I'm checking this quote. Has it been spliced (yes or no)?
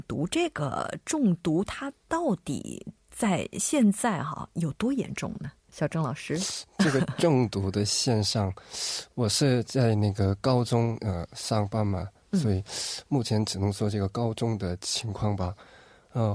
yes